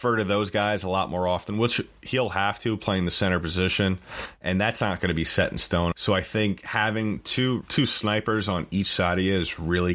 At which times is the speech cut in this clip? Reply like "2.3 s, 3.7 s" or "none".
5.9 s, 7.6 s

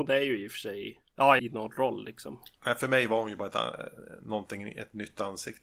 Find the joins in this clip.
1.4 s

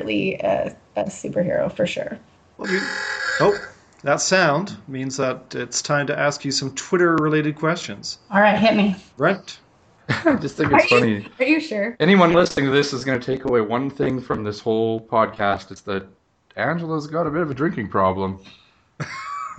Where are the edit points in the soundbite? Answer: 2.6 s

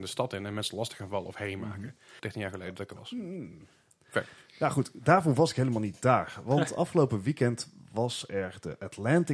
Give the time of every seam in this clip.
2.2 s

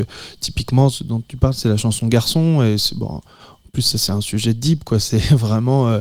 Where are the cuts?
none

